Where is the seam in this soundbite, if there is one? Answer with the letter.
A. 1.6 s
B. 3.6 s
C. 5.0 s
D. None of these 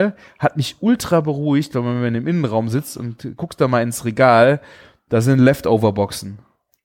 D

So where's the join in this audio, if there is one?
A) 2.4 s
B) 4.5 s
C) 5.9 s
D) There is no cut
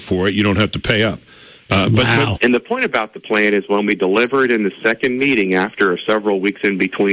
A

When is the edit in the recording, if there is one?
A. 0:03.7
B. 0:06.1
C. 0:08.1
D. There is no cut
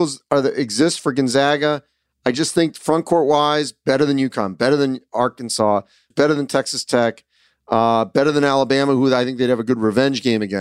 B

